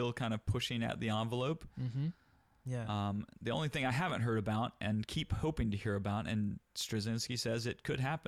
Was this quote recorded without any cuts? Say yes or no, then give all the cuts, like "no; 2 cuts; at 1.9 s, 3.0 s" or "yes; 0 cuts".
yes; 0 cuts